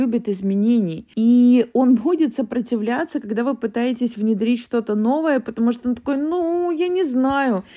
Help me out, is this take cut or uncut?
uncut